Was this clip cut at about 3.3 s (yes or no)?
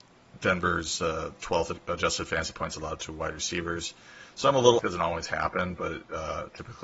no